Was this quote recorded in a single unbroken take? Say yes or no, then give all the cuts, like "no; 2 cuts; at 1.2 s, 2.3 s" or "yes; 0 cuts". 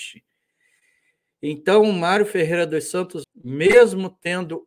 no; 1 cut; at 3.2 s